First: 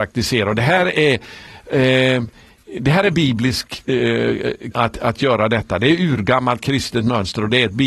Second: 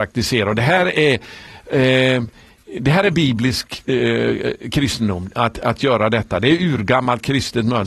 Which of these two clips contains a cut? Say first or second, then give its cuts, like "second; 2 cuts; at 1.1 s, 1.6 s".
first; 1 cut; at 4.7 s